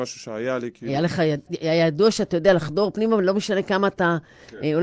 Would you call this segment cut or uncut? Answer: cut